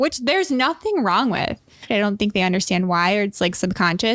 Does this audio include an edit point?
yes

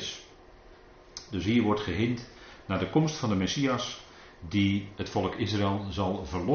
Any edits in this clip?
no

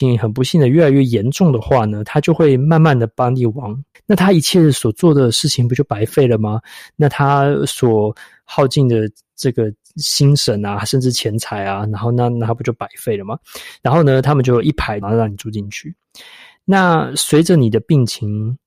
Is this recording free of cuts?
no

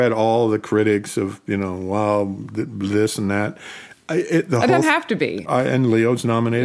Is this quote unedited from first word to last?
no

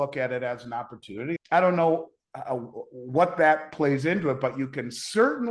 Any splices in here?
yes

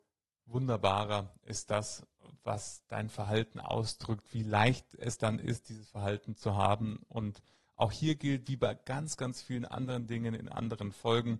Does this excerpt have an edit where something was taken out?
no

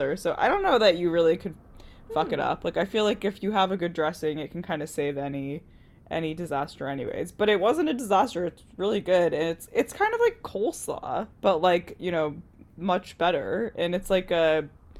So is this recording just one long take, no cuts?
no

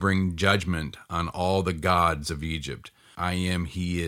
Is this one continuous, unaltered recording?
no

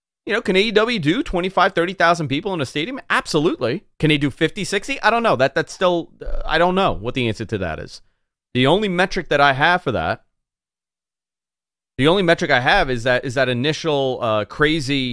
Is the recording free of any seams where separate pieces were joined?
no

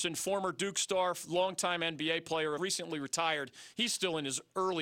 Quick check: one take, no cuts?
no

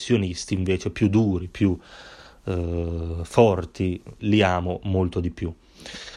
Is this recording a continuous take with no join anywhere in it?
no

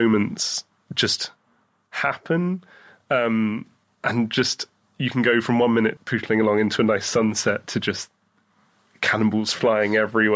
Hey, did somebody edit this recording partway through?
yes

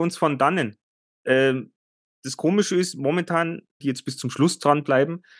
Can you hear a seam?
yes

